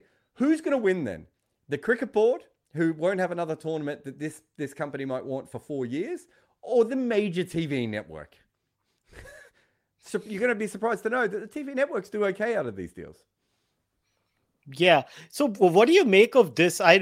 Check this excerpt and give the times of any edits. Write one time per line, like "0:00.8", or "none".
none